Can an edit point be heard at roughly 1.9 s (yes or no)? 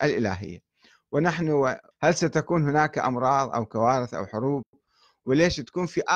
yes